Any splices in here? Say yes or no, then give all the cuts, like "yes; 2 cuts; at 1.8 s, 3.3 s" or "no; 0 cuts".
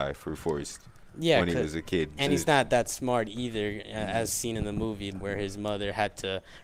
yes; 1 cut; at 5.1 s